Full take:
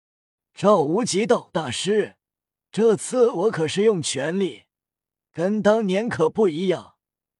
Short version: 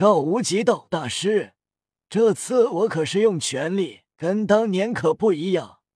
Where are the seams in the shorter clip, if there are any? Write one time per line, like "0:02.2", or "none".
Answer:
0:04.1